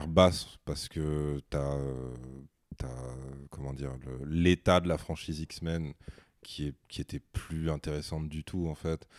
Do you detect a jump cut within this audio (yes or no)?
no